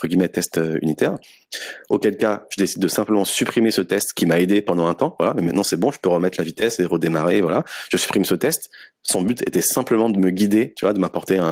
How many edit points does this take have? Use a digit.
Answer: 0